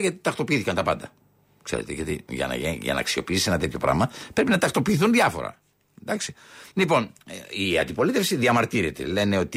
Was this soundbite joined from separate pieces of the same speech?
no; 0 cuts

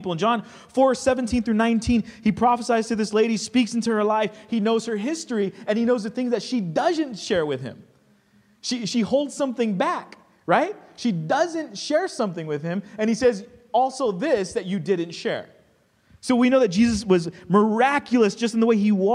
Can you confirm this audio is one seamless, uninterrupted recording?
yes; 0 cuts

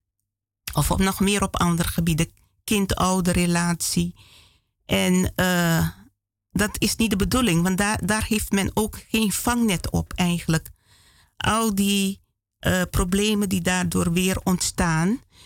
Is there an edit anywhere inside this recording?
no; 0 cuts

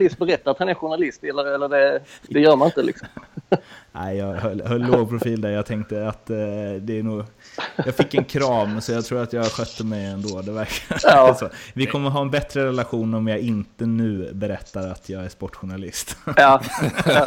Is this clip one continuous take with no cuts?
no; 2 cuts; at 2.3 s, 11.7 s

